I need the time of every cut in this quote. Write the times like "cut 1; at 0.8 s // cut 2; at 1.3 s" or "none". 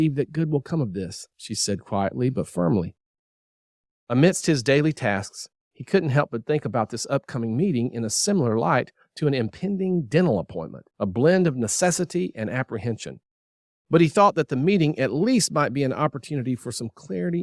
cut 1; at 3.9 s // cut 2; at 10.9 s